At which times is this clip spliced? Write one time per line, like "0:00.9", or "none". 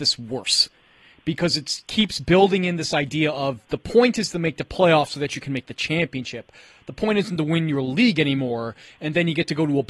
none